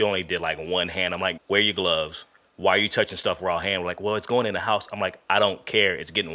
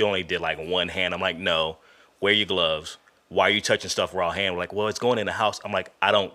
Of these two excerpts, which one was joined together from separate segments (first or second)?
first